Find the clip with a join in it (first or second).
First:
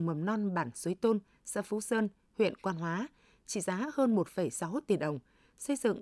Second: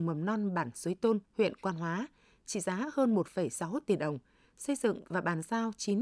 second